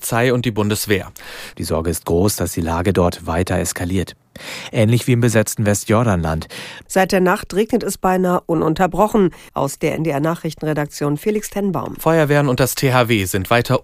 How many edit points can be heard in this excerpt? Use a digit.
3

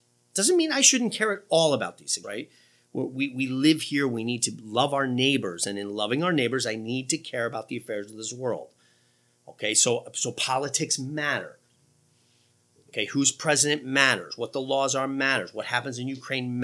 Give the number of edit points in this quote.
1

